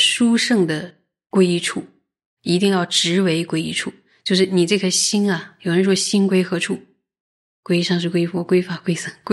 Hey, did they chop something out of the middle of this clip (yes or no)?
no